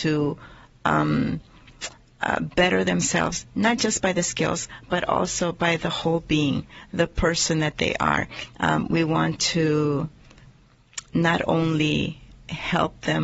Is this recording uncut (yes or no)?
no